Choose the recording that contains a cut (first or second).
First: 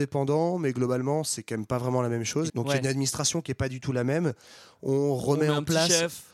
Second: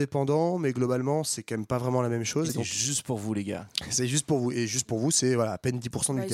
first